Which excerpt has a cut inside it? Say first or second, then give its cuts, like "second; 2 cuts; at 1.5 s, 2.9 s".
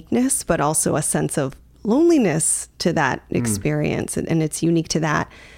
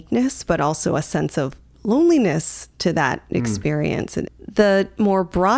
second; 1 cut; at 4.3 s